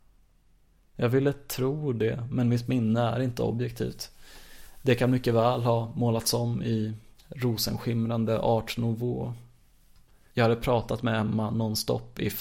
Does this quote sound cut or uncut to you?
cut